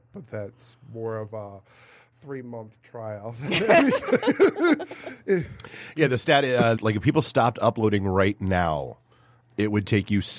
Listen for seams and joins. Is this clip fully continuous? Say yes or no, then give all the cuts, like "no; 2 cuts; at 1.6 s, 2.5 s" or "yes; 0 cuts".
no; 1 cut; at 6.8 s